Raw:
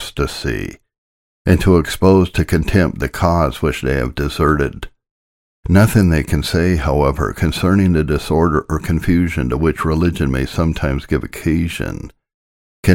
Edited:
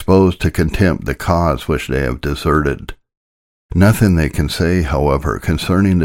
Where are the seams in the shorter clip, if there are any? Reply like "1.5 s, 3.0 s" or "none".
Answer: none